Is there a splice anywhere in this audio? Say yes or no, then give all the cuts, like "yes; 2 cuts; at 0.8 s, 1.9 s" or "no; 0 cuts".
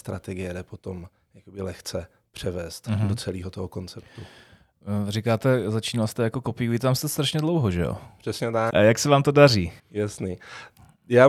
yes; 2 cuts; at 8.7 s, 9.8 s